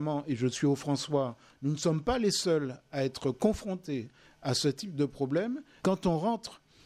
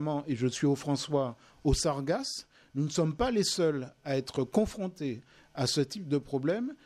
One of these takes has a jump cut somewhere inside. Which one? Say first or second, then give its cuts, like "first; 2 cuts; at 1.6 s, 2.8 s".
first; 2 cuts; at 1.5 s, 5.8 s